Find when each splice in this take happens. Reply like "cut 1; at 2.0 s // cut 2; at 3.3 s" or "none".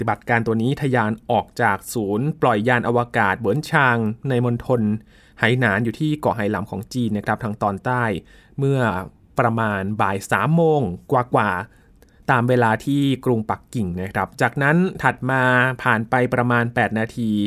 none